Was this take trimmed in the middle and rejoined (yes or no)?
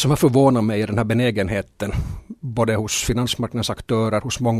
no